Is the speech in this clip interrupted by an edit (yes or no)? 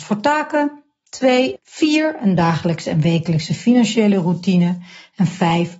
yes